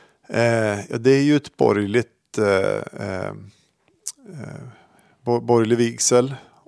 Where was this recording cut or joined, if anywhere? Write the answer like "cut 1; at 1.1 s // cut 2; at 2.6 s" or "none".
none